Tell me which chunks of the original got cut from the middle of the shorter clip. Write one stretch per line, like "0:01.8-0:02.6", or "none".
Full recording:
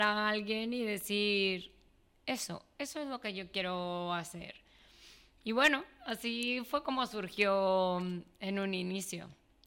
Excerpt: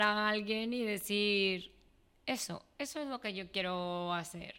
none